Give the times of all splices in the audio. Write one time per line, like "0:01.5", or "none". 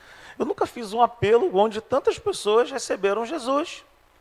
none